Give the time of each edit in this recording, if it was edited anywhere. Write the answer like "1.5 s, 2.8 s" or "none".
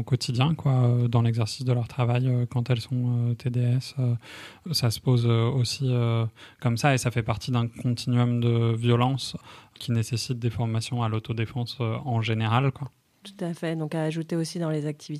12.7 s